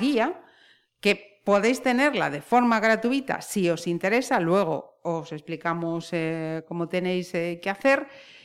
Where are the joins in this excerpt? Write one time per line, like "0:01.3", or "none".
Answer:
none

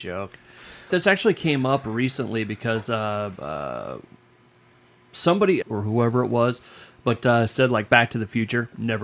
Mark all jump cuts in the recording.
0:00.9
0:05.6

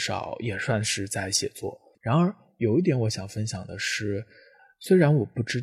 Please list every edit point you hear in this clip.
0:01.9

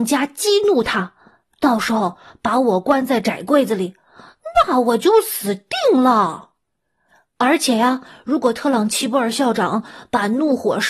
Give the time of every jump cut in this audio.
none

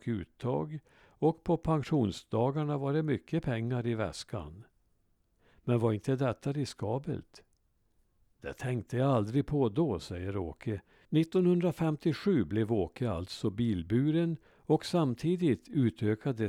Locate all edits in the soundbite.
0:11.0

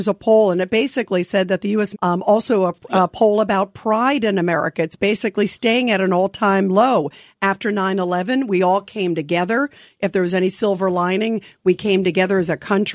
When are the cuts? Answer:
0:01.9

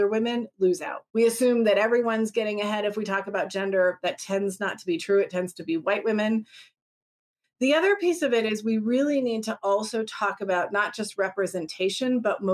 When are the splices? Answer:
0:01.1

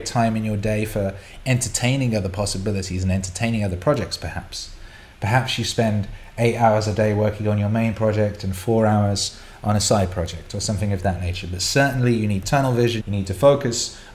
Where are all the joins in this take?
0:13.0

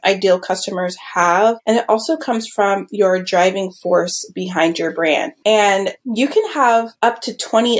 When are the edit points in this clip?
0:05.4

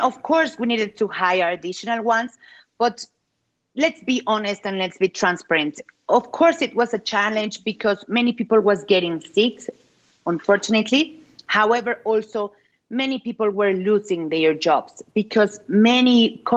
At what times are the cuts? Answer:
none

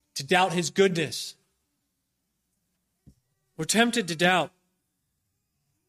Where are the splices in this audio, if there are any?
none

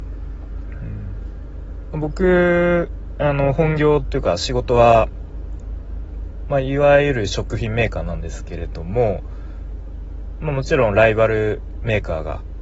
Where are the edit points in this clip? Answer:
0:10.4

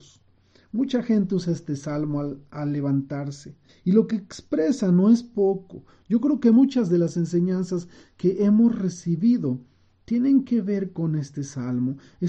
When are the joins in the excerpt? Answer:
0:03.7

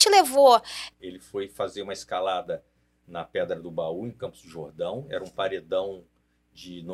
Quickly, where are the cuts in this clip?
0:00.9

